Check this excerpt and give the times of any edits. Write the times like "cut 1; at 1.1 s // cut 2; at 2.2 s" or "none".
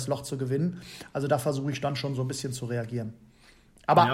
none